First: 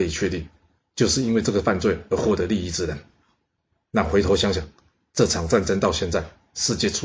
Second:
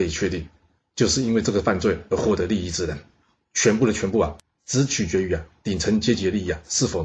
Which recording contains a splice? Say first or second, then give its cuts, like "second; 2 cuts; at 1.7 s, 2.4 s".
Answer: second; 1 cut; at 3.4 s